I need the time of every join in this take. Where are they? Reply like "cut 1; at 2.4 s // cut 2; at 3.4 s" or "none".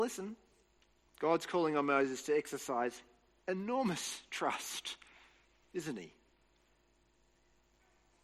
cut 1; at 1.0 s